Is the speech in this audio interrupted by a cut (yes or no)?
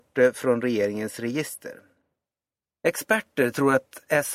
yes